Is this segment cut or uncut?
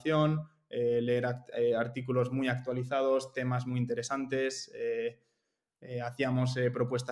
uncut